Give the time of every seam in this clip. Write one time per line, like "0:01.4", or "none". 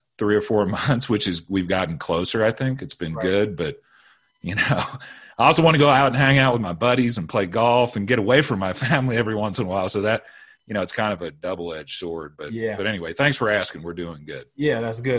none